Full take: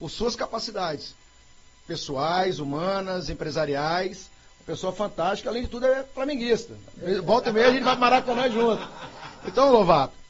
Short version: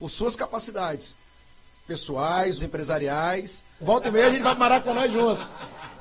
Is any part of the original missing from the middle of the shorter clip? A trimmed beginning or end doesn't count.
yes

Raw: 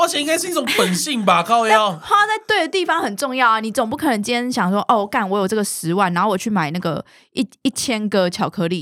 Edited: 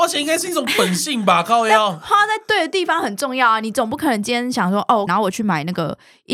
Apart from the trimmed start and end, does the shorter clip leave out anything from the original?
yes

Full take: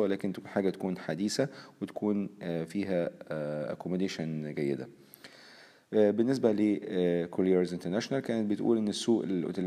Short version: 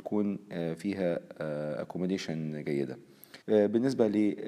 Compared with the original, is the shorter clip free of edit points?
no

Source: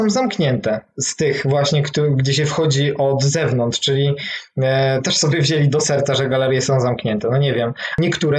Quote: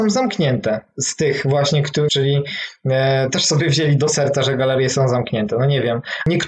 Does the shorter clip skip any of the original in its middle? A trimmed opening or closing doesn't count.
yes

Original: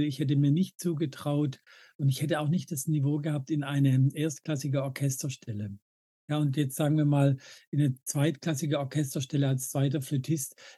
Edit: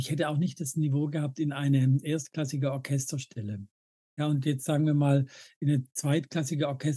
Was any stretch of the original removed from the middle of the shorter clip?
no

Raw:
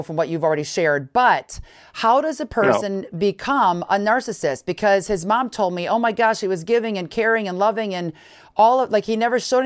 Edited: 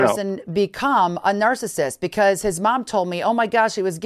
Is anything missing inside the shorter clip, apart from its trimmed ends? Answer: no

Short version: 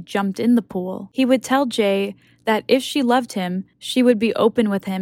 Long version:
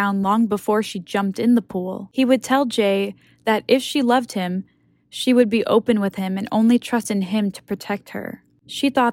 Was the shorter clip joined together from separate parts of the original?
yes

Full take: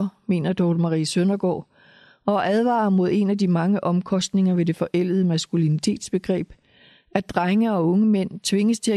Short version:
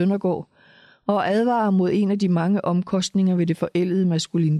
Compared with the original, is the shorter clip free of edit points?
yes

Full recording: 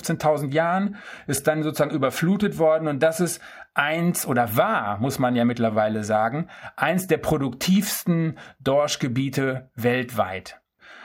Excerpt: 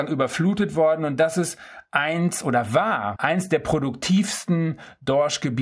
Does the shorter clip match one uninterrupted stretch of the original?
no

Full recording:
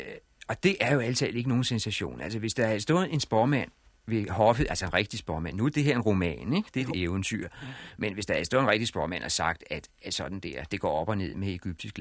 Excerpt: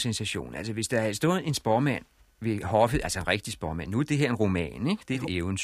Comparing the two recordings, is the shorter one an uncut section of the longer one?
yes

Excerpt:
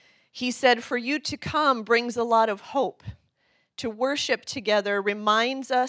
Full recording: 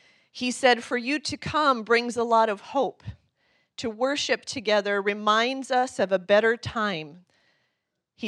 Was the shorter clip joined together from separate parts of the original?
no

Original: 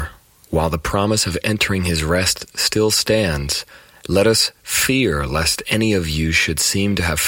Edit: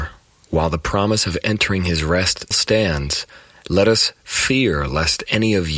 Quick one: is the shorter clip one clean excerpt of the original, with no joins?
no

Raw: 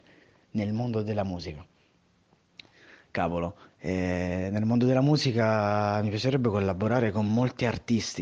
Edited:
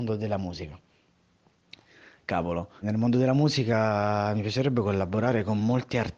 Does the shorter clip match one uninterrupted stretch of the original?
no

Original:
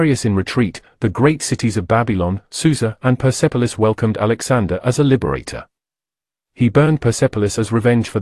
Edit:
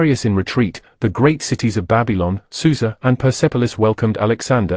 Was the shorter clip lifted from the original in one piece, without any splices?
yes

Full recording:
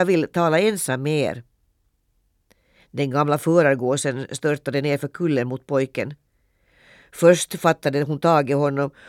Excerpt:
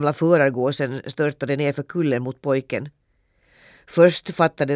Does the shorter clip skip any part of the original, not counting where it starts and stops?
no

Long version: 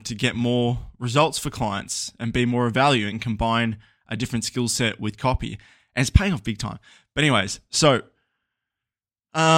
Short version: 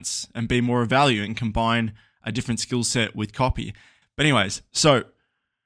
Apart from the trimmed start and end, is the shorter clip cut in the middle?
yes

